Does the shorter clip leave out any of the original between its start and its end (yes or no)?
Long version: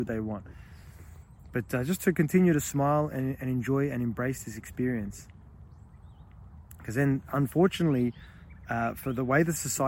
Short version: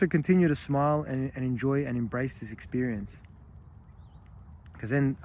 no